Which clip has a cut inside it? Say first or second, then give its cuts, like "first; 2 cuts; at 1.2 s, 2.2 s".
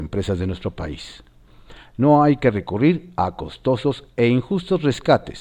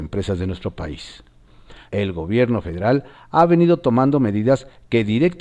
second; 1 cut; at 1.9 s